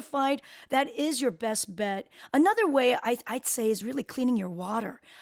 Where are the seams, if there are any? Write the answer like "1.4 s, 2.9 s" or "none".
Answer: none